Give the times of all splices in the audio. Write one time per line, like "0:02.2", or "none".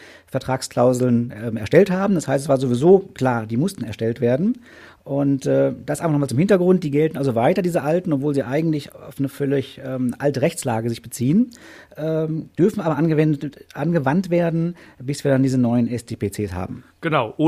none